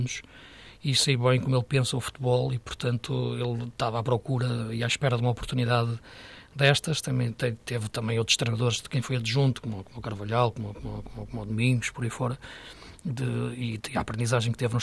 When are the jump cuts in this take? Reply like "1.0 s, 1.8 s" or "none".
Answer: none